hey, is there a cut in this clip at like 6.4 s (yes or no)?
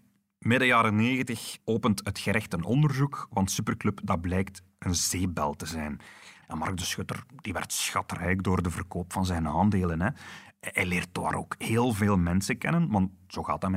yes